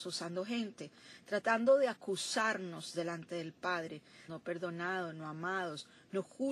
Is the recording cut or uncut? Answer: cut